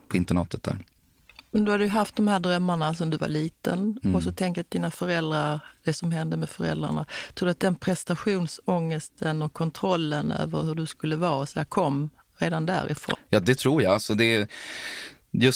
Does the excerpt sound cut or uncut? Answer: cut